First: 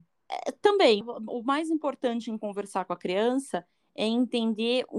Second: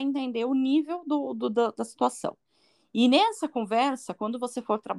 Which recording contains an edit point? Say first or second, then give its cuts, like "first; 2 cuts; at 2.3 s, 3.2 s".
first; 1 cut; at 1.0 s